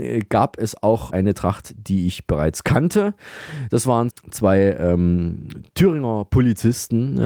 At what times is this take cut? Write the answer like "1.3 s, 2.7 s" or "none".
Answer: 4.1 s